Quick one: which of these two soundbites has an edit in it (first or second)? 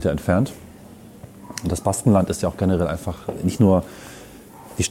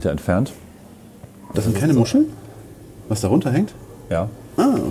second